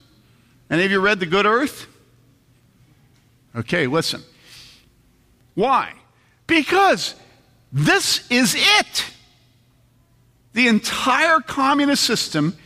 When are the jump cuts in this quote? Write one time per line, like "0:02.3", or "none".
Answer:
0:05.4